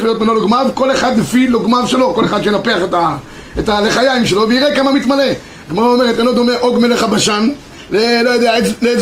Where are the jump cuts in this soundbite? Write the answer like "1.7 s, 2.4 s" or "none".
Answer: none